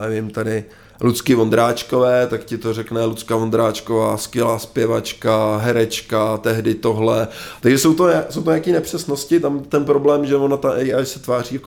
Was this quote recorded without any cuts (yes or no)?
no